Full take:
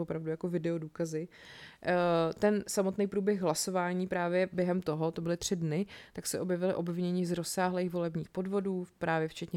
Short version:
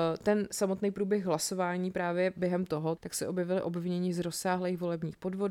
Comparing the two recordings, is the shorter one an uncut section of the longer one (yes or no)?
no